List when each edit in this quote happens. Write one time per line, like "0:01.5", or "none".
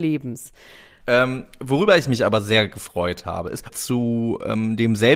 0:01.0
0:03.7